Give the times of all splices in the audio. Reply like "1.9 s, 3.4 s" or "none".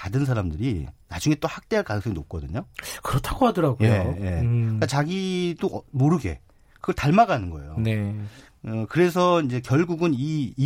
none